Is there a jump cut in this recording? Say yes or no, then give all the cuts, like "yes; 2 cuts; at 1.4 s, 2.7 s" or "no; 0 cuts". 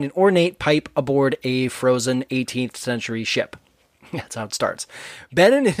no; 0 cuts